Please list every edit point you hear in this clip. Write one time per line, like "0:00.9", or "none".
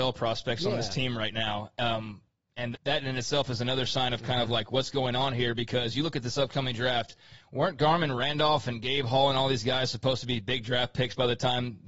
0:02.7